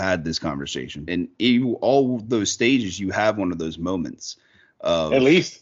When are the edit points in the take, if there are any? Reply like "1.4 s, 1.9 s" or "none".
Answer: 1.1 s